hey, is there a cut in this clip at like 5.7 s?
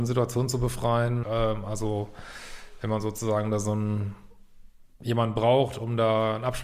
no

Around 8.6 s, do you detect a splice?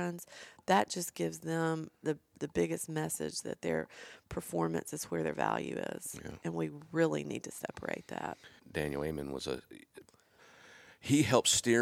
yes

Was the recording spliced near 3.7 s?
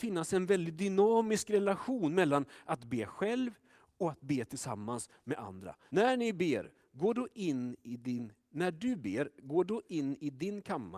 no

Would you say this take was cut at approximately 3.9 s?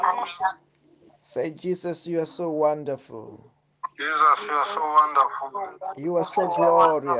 yes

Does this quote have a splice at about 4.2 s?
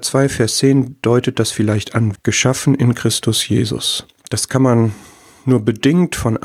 yes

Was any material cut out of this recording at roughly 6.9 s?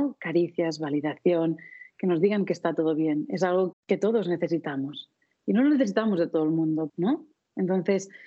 yes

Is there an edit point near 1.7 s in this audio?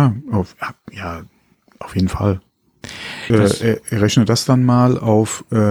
no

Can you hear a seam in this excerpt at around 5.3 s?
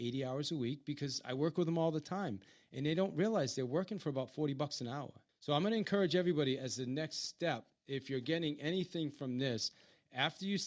yes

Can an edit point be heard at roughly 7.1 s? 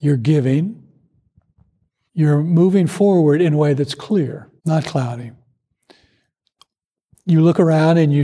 no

